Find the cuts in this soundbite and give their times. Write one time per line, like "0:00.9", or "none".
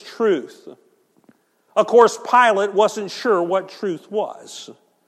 none